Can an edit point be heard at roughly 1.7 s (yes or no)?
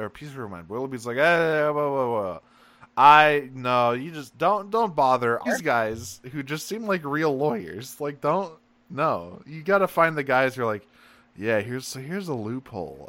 no